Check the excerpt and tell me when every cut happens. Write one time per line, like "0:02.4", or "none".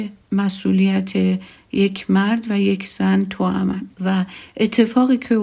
0:03.9